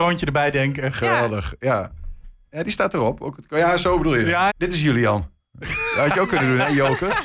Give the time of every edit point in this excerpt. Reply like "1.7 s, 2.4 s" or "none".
4.5 s